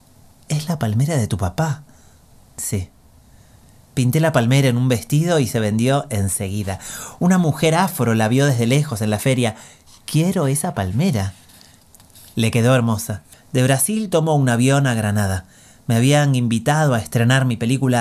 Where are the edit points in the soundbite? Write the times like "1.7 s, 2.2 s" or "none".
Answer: 13.3 s